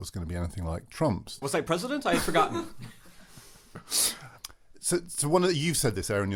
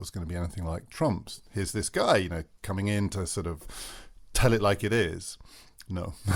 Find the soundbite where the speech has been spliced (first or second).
first